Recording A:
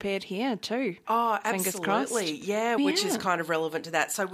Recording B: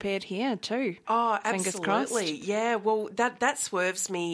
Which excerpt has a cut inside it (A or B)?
A